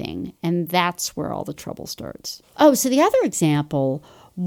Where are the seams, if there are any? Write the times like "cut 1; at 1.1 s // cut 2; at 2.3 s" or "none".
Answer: cut 1; at 2.5 s